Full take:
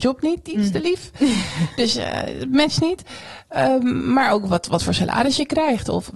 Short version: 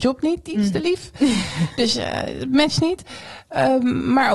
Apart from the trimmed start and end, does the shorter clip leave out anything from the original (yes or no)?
no